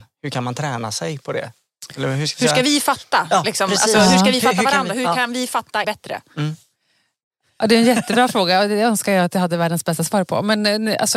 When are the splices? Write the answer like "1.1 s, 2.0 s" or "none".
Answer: 5.8 s